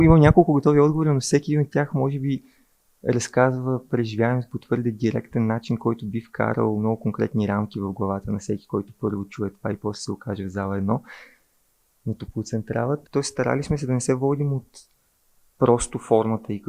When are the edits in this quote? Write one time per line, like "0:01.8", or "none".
0:13.1